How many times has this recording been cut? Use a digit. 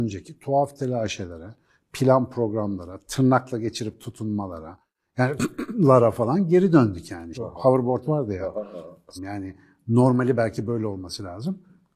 2